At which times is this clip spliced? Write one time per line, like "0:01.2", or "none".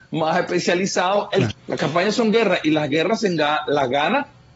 0:01.5